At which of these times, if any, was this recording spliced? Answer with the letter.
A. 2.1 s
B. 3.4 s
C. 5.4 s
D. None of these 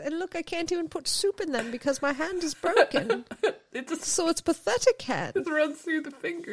C